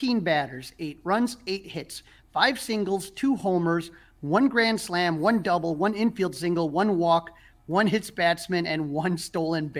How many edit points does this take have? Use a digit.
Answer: 0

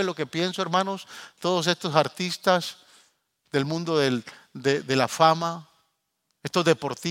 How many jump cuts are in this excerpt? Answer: 1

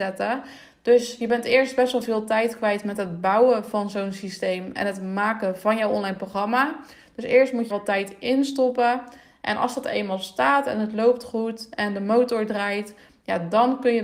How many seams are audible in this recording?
1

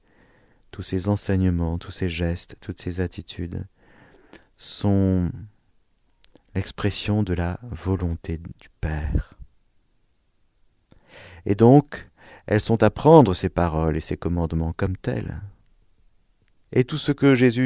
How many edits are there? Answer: 1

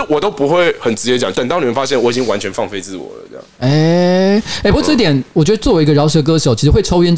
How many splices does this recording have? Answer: 1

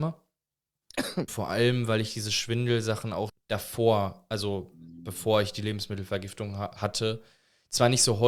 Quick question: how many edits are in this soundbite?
2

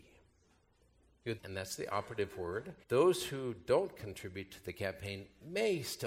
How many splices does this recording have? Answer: 2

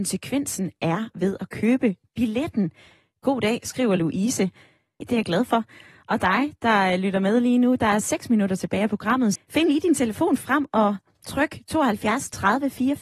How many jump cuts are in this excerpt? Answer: 2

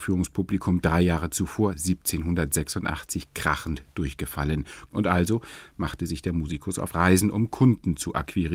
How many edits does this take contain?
1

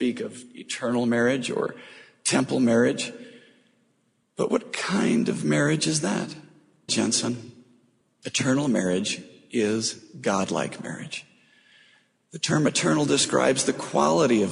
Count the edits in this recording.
1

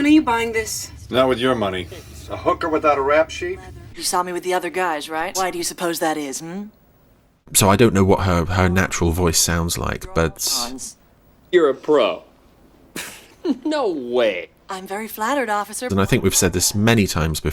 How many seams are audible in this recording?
3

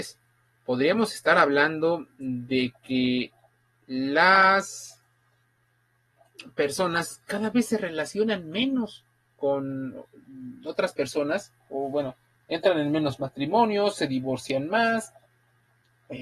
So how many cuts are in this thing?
0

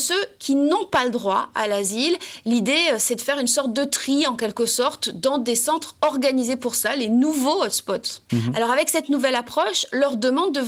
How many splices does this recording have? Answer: 1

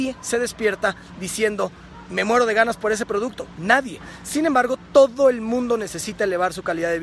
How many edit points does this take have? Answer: 0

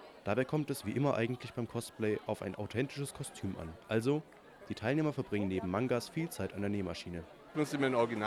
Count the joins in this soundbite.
0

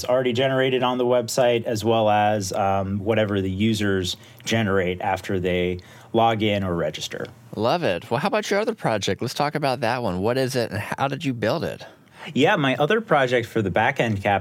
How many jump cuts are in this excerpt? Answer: 0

